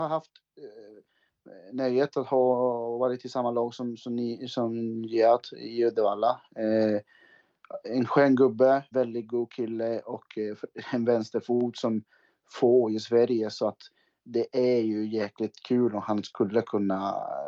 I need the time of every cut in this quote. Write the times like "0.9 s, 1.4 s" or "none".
8.9 s